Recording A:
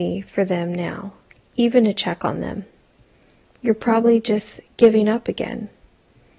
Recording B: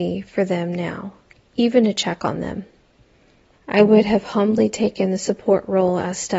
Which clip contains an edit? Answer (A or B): B